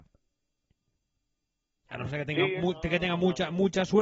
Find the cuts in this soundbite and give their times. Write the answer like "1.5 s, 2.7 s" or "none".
1.8 s